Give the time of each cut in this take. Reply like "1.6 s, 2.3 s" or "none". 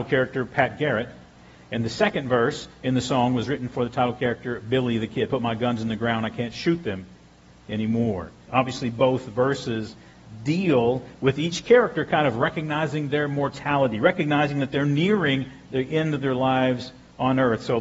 8.5 s